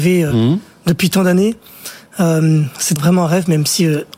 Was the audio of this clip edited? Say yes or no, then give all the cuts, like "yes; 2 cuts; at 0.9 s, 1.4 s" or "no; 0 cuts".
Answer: yes; 1 cut; at 3.0 s